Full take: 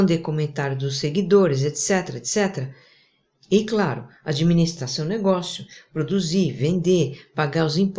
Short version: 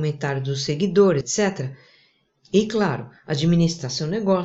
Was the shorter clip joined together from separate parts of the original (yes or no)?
yes